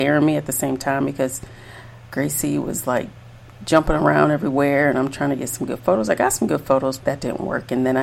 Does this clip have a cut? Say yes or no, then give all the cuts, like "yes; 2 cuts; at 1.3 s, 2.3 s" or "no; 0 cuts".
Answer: yes; 1 cut; at 7.0 s